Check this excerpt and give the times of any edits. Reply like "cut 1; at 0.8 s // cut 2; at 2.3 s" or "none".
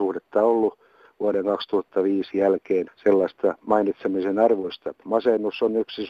cut 1; at 5.0 s